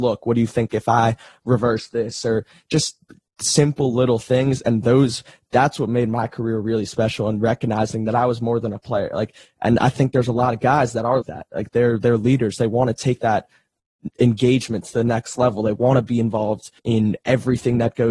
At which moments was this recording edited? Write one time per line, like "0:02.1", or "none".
0:11.2
0:16.8